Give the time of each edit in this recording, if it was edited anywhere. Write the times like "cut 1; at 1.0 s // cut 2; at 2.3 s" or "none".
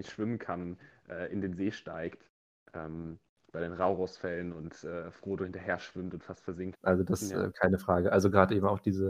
cut 1; at 6.7 s